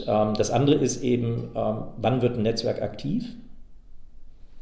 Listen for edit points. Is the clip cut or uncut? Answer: uncut